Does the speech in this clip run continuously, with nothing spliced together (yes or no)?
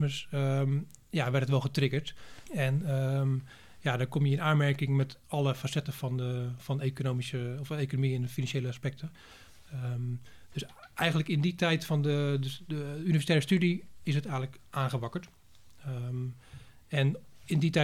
no